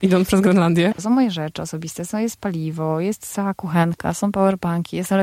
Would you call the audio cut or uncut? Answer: cut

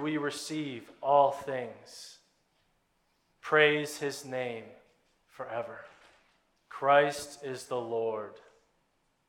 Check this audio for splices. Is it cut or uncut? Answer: cut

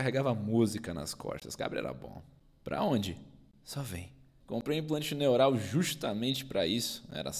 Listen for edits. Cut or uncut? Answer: cut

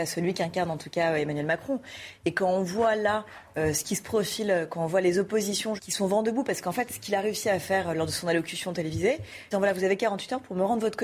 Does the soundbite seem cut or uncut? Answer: cut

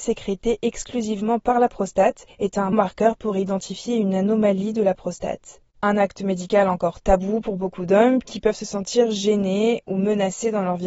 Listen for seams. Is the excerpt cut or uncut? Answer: cut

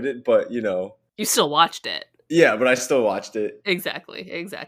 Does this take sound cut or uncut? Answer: uncut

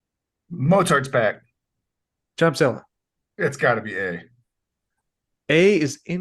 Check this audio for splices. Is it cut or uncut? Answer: uncut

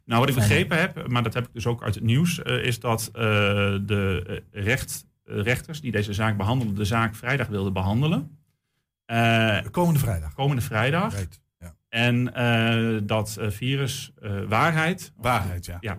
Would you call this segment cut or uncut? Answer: uncut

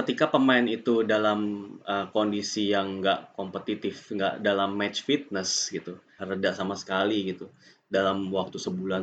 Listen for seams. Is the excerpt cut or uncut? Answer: cut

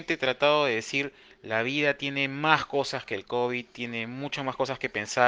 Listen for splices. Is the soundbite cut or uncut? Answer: uncut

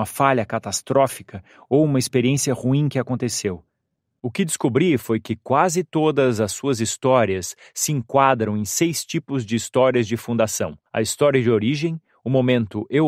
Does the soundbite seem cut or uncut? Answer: cut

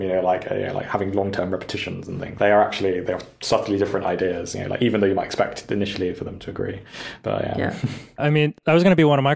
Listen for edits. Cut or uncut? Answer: cut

